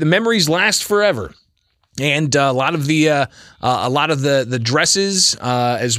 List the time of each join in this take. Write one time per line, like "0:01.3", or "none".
none